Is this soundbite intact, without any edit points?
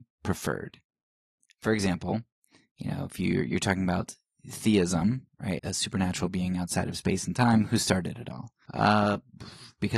no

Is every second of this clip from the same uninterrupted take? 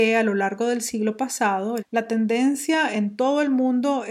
no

